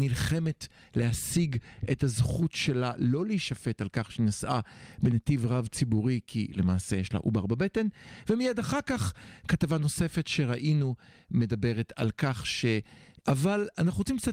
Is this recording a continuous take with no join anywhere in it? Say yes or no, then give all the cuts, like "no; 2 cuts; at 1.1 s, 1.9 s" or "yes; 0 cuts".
no; 1 cut; at 13.2 s